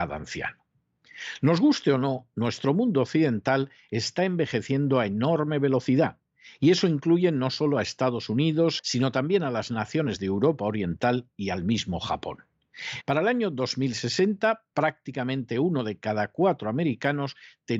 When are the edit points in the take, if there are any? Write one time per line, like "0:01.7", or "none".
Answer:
0:08.8
0:13.0

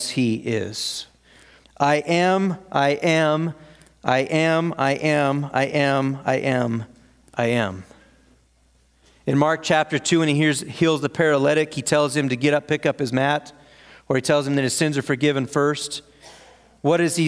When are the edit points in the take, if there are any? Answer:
0:01.6

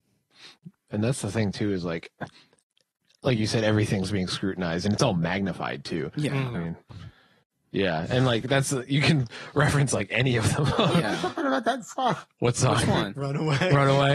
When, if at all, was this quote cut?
0:06.5

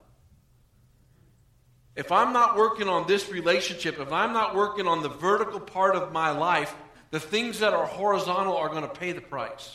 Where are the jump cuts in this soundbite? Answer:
none

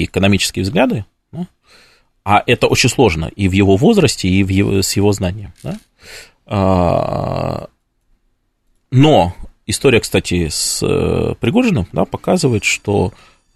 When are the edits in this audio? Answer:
none

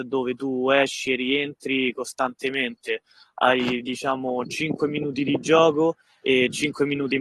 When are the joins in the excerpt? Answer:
none

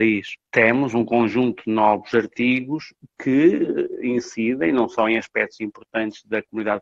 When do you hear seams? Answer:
none

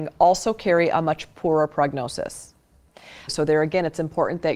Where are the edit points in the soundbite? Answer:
0:03.3

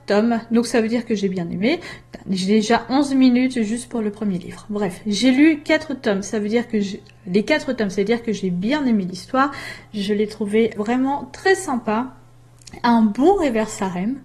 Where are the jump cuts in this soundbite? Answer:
0:10.8

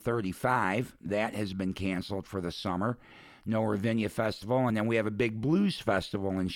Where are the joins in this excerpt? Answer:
none

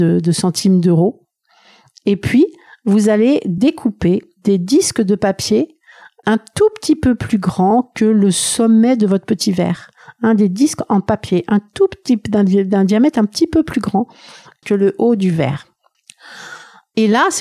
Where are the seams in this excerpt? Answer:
none

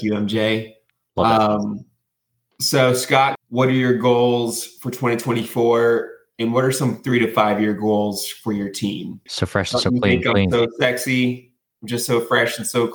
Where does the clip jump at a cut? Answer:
0:03.4
0:09.3

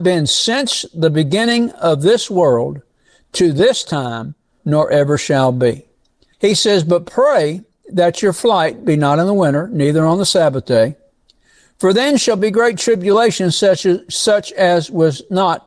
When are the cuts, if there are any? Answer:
0:04.6
0:06.3

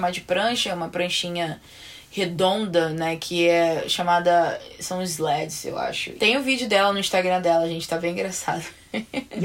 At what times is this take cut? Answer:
0:06.2

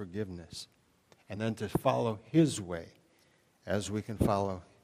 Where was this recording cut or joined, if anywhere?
none

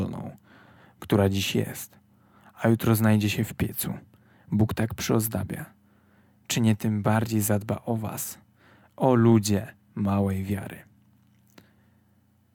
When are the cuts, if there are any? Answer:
none

